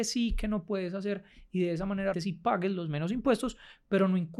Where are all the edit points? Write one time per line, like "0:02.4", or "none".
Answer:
0:02.1